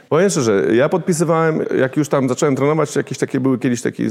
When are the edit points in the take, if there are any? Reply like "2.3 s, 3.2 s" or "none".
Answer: 1.6 s